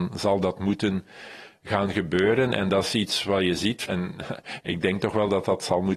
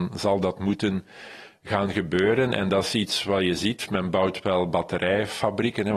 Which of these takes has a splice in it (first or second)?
first